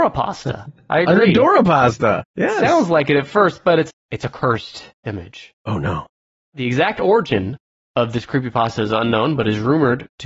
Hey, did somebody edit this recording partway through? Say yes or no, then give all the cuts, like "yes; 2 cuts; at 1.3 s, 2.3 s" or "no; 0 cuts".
yes; 1 cut; at 3.9 s